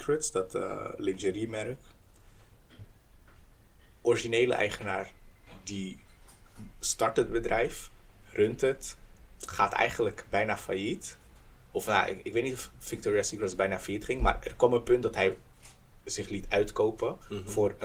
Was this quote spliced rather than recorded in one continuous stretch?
no; 0 cuts

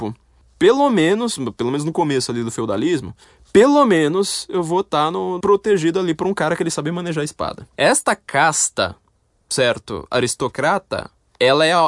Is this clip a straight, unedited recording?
no; 2 cuts; at 5.4 s, 7.7 s

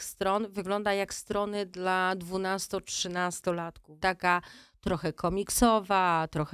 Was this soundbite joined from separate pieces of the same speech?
yes; 1 cut; at 4.0 s

